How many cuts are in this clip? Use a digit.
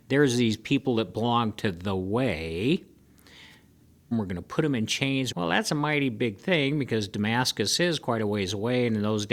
2